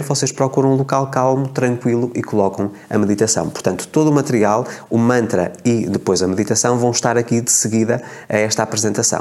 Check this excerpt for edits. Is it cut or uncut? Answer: uncut